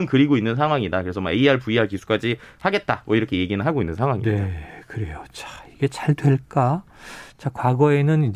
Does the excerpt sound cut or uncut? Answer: uncut